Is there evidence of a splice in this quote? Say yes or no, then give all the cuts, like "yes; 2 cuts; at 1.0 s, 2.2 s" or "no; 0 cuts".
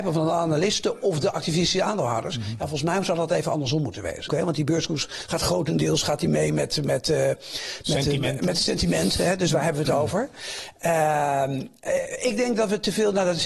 yes; 1 cut; at 4.3 s